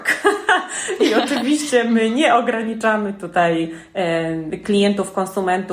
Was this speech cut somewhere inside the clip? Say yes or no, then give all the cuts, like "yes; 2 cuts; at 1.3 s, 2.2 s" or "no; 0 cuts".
no; 0 cuts